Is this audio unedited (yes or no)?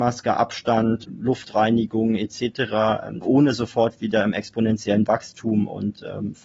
no